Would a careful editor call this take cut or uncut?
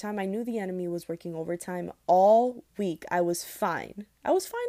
uncut